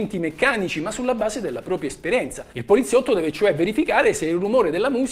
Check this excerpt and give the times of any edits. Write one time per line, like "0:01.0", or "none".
none